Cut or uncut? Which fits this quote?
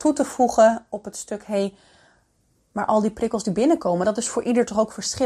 uncut